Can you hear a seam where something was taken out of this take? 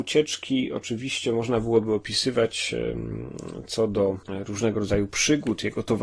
yes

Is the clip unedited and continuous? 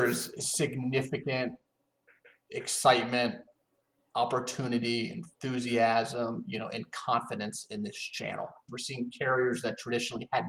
no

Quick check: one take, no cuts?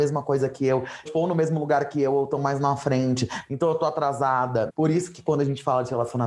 no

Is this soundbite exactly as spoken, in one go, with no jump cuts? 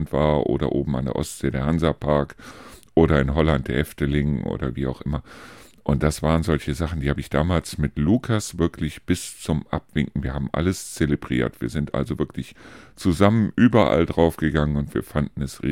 yes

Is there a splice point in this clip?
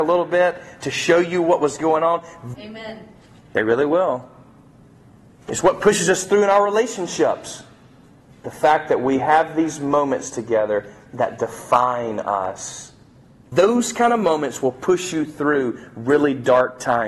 yes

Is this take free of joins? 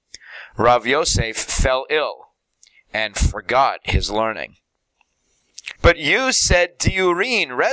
no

